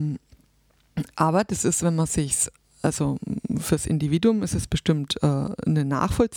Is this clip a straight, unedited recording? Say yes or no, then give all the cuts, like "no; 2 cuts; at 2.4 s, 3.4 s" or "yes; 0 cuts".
yes; 0 cuts